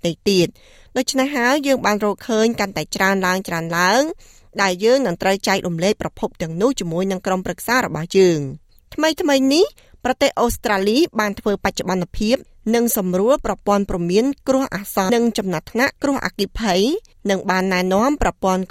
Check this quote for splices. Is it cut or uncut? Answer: cut